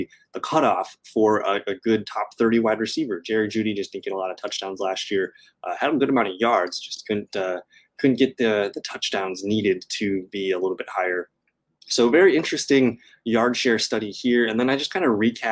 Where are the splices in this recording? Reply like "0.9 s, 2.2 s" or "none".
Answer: none